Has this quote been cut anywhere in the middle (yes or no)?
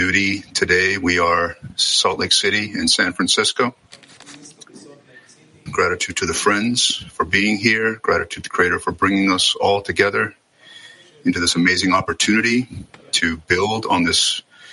yes